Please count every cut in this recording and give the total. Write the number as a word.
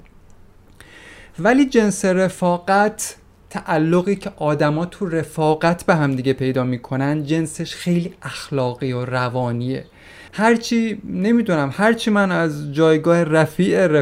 one